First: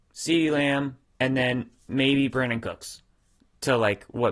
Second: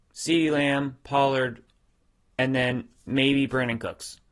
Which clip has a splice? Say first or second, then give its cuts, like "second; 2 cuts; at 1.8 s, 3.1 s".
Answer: first; 1 cut; at 1.0 s